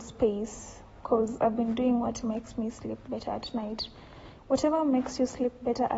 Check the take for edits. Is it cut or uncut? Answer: cut